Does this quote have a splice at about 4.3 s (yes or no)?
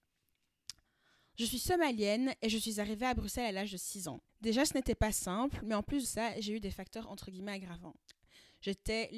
yes